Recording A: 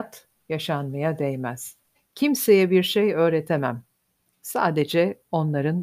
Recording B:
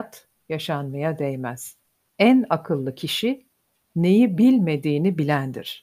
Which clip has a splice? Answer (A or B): A